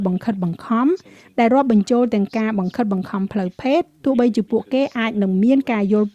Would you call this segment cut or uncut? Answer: uncut